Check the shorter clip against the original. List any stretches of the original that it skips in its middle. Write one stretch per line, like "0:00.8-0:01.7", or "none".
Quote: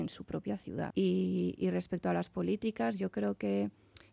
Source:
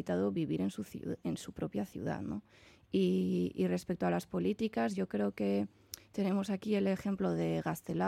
0:02.2-0:02.9